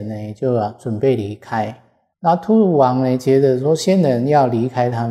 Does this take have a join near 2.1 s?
yes; 1 cut; at 2.1 s

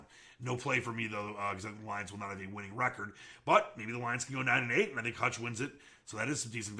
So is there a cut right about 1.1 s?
no; 0 cuts

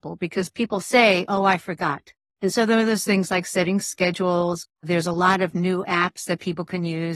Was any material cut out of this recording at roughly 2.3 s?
yes; 1 cut; at 2.3 s

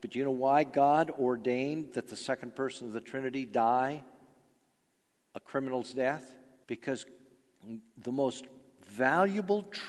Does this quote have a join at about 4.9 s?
no; 1 cut; at 6.6 s

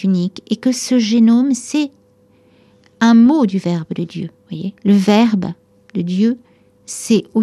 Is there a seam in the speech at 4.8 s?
yes; 1 cut; at 4.8 s

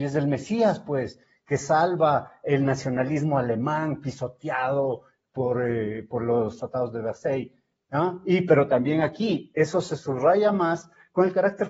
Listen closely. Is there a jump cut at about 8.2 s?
no; 0 cuts

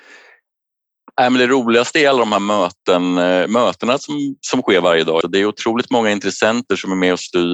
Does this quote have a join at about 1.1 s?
no; 1 cut; at 5.2 s

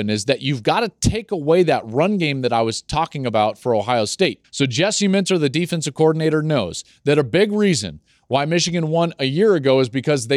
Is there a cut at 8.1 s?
no; 1 cut; at 4.4 s

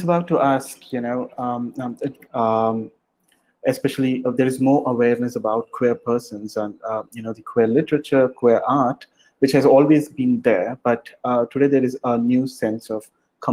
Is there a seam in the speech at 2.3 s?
yes; 1 cut; at 2.3 s

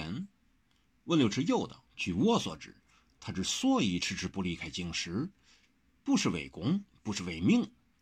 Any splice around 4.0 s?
no; 0 cuts

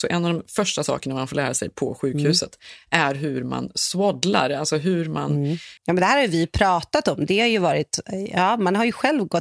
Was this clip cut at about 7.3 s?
no; 1 cut; at 5.8 s

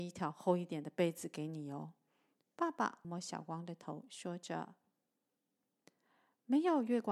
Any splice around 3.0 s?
yes; 1 cut; at 3.0 s

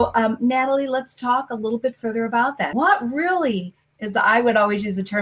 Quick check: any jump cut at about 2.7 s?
yes; 1 cut; at 2.7 s

